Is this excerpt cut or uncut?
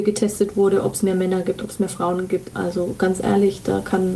cut